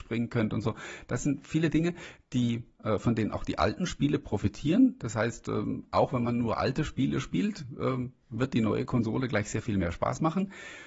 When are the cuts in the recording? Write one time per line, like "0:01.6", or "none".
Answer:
none